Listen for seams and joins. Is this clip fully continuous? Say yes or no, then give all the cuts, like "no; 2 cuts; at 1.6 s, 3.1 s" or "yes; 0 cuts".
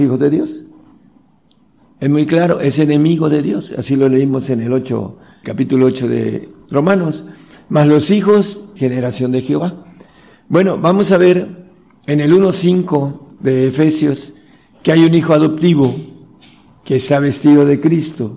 no; 2 cuts; at 5.4 s, 8.8 s